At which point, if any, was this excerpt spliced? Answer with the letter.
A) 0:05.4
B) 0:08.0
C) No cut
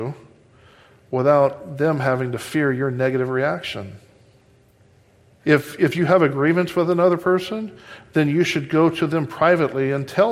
A